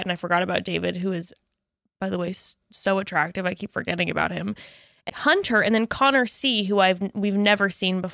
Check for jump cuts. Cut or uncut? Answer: cut